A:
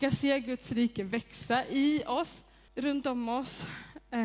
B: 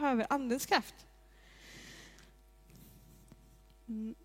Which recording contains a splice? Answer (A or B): A